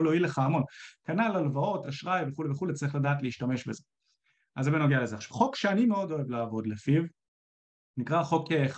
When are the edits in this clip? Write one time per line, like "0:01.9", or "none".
none